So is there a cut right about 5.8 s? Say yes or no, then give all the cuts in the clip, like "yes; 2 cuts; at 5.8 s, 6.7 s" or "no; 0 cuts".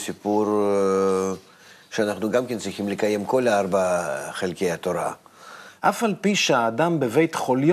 yes; 1 cut; at 5.8 s